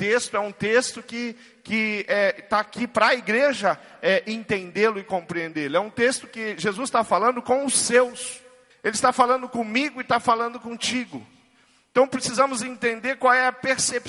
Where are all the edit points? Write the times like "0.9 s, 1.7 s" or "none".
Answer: 8.7 s